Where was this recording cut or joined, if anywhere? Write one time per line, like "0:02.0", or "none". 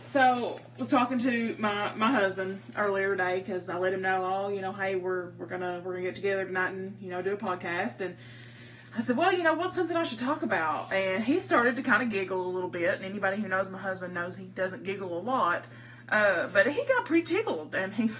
none